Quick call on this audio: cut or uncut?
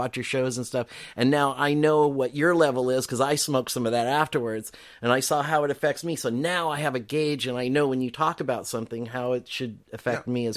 uncut